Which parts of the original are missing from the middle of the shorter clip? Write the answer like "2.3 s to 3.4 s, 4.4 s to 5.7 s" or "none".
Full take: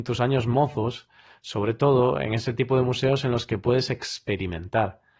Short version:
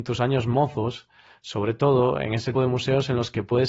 2.5 s to 2.7 s